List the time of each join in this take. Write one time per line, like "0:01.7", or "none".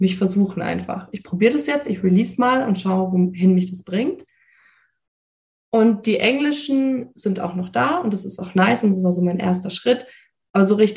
none